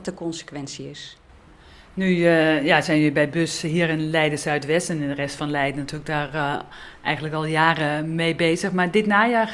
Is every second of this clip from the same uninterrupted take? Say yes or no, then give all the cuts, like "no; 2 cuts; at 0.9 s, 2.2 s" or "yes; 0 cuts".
yes; 0 cuts